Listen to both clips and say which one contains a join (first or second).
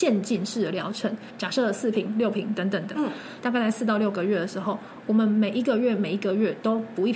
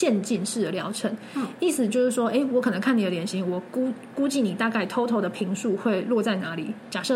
first